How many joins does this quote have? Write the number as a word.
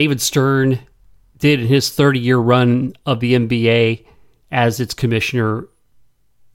zero